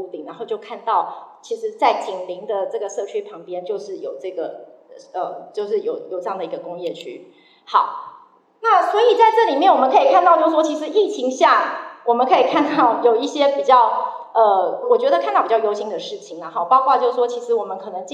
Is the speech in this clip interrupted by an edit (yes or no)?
yes